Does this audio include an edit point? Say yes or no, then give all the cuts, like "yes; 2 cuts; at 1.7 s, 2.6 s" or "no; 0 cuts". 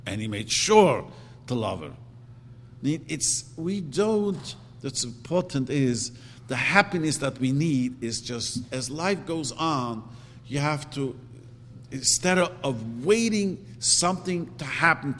no; 0 cuts